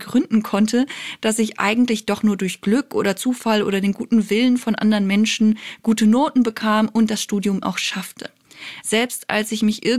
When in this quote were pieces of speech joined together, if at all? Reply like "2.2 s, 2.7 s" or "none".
7.6 s, 8.8 s

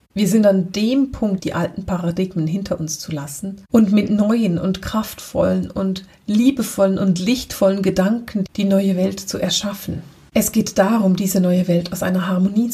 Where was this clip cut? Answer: 1.4 s

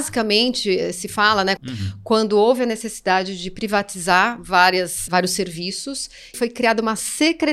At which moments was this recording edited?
1.6 s, 5.1 s, 6.3 s

